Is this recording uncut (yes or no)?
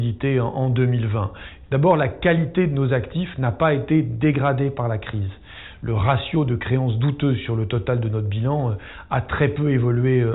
no